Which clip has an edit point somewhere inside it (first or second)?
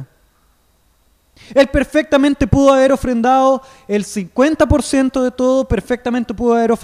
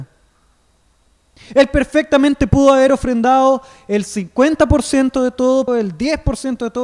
second